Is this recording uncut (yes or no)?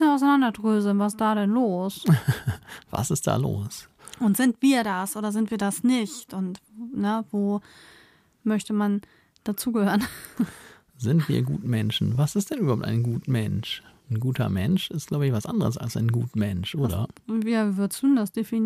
yes